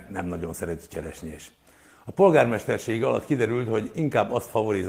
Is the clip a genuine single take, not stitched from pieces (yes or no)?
yes